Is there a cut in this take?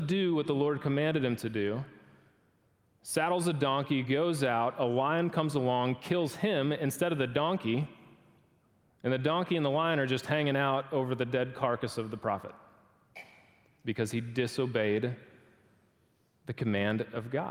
no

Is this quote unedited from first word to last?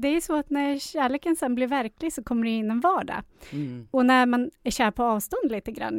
yes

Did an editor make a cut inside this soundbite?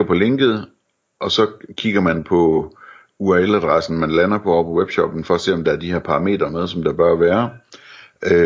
no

